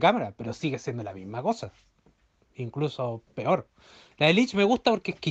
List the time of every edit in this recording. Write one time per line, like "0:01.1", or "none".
0:04.1